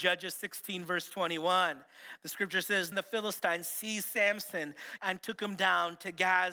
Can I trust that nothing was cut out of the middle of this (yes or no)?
no